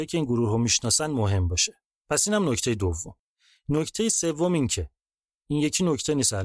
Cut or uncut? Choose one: uncut